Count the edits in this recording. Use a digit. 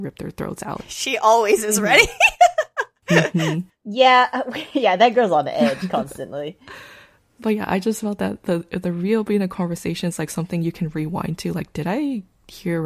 0